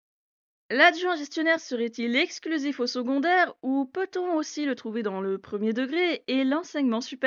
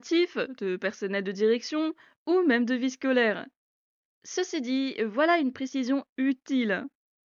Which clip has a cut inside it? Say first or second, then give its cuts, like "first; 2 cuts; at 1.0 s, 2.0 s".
second; 1 cut; at 4.0 s